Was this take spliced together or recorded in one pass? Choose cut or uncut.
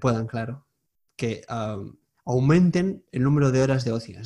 uncut